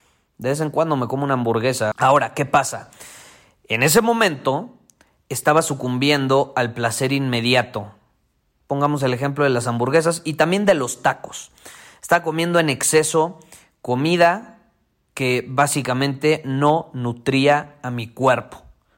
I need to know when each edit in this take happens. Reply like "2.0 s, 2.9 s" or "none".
1.9 s